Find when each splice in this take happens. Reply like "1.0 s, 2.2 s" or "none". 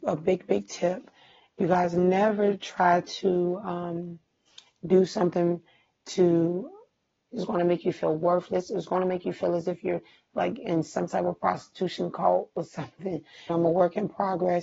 7.3 s, 13.5 s